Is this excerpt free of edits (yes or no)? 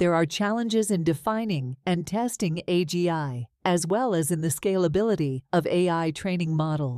yes